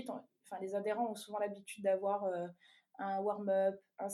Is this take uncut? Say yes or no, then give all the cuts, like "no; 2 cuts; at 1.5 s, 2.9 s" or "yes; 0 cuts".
yes; 0 cuts